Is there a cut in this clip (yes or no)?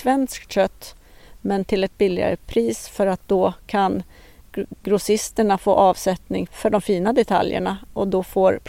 yes